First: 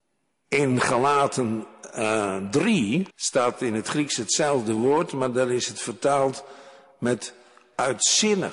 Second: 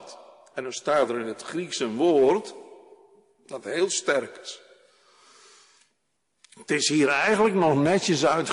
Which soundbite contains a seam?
first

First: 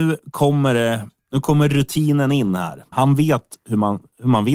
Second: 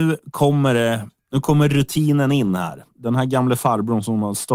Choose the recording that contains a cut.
first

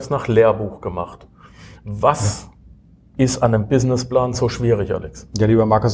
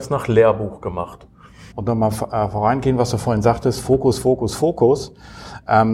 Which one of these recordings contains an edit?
second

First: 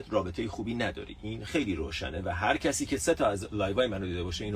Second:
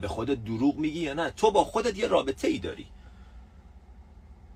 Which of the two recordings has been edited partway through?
first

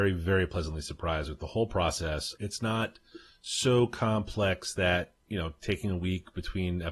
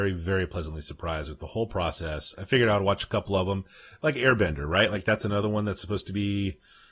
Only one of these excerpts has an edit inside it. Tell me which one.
first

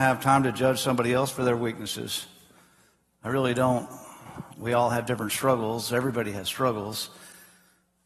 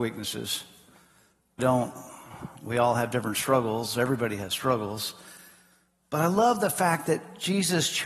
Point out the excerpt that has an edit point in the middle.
second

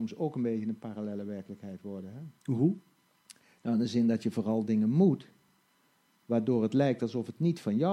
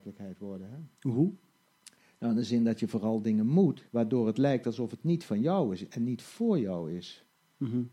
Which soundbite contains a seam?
second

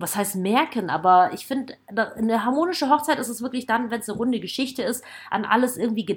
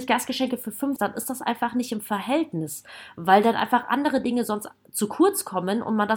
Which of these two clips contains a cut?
second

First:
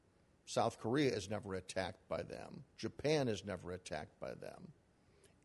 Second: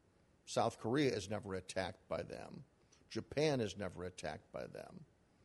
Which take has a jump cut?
first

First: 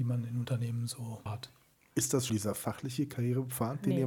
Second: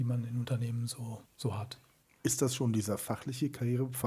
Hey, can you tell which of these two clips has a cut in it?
first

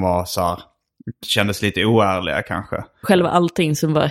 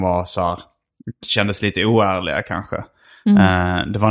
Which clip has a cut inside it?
first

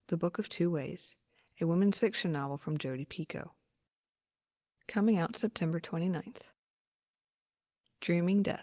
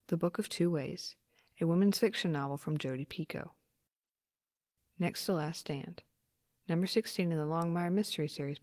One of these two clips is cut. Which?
first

